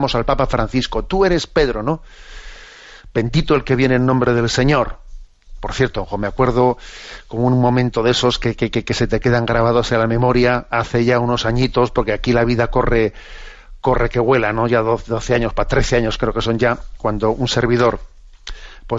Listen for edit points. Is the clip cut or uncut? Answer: uncut